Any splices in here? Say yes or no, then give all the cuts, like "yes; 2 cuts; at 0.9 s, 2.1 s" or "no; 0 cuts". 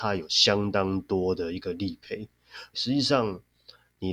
yes; 1 cut; at 2.7 s